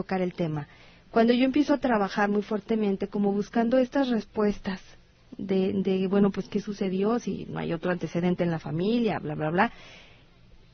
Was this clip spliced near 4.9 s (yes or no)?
no